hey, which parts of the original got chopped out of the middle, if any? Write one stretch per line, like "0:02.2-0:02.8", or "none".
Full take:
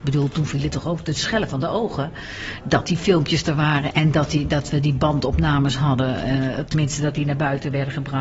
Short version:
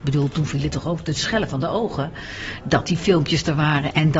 none